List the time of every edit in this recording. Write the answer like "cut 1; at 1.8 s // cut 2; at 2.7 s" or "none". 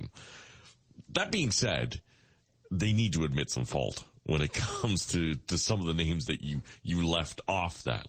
none